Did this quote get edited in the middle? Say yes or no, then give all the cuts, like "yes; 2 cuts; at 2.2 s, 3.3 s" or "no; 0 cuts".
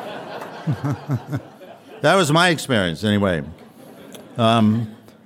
no; 0 cuts